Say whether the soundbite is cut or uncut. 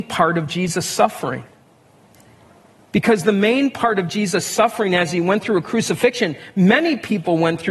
uncut